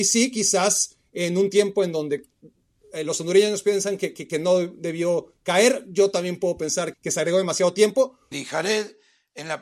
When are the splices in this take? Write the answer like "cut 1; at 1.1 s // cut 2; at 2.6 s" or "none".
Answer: cut 1; at 6.9 s // cut 2; at 8.3 s